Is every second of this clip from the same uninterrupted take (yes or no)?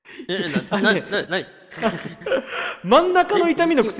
no